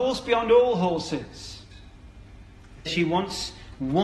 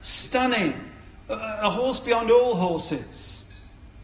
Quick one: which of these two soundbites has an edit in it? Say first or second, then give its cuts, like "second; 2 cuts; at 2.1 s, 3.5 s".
first; 1 cut; at 2.9 s